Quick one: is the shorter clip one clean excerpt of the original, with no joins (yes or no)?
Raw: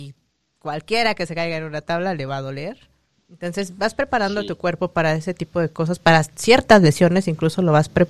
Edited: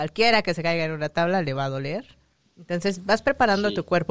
yes